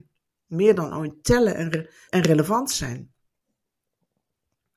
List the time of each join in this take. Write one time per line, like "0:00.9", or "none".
0:02.1